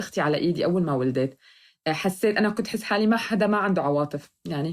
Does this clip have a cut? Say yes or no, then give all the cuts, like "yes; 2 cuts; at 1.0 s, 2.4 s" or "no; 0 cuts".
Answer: no; 0 cuts